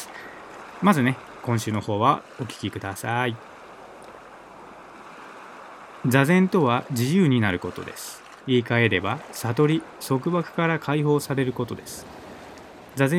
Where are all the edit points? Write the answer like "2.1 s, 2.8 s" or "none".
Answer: 8.4 s